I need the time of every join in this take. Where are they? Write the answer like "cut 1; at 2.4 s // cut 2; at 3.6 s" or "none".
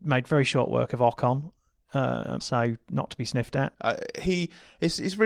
cut 1; at 2.4 s // cut 2; at 3.7 s